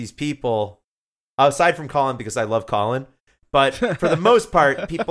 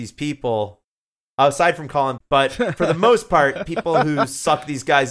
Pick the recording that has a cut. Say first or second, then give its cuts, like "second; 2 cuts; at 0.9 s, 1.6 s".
second; 1 cut; at 2.2 s